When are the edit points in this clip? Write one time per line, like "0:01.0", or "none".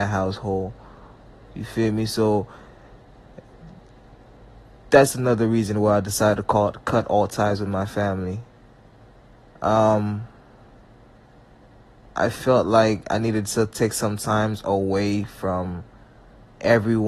none